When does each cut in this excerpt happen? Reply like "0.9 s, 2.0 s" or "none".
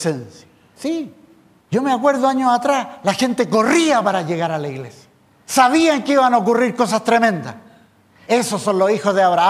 5.5 s, 8.3 s